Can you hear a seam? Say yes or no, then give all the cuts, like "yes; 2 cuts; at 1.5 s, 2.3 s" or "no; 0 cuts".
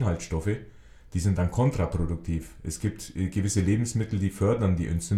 no; 0 cuts